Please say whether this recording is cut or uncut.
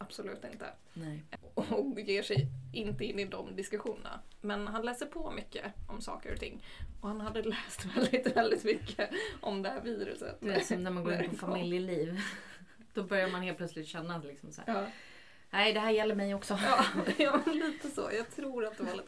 uncut